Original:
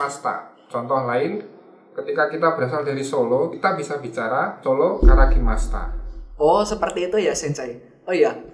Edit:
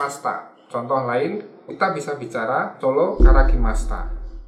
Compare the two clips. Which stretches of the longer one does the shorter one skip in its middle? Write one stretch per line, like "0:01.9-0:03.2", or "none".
0:01.7-0:03.5